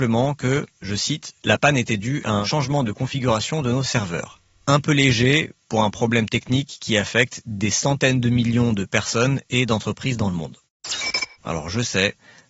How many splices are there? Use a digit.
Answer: 1